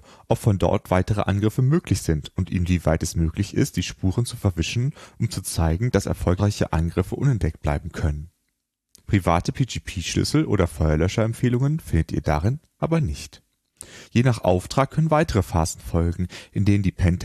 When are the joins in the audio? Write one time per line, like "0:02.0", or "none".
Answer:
0:09.0
0:14.1

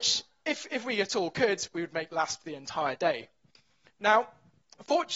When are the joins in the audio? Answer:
none

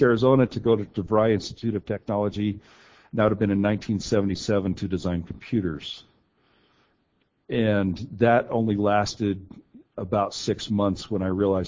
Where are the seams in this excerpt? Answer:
none

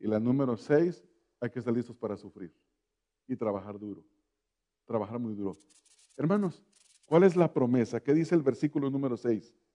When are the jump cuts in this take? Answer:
0:06.9

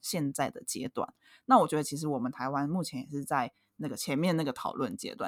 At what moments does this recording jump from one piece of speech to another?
none

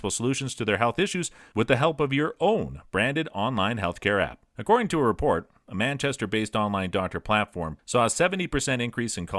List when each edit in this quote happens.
0:04.5
0:07.8

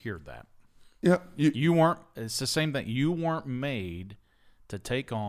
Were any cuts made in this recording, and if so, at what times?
none

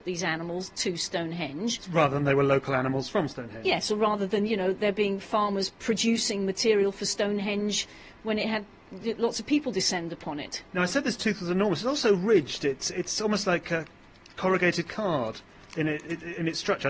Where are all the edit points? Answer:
none

